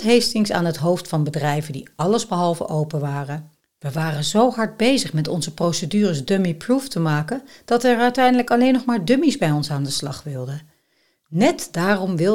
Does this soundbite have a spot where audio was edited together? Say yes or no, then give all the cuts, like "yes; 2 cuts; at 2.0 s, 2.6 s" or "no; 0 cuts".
no; 0 cuts